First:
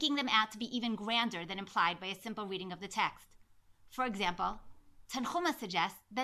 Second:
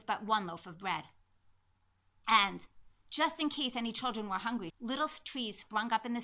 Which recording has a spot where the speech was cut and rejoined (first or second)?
second